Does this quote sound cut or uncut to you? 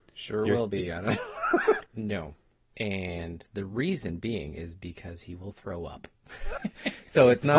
cut